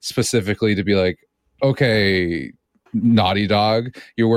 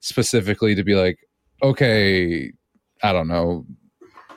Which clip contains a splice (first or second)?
first